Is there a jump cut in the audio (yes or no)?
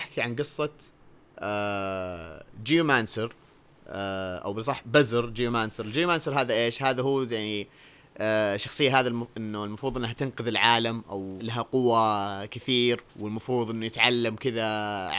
yes